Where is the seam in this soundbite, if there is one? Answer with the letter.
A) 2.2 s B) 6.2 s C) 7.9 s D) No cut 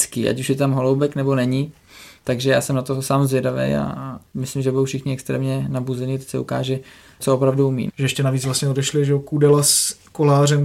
C